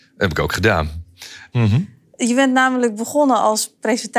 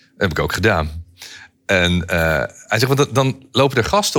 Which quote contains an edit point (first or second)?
first